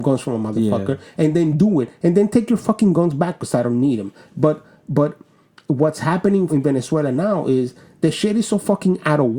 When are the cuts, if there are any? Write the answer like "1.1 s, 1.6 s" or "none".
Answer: 6.5 s